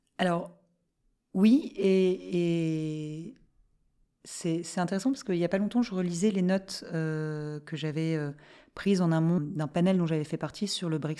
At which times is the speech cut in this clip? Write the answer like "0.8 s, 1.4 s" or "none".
9.4 s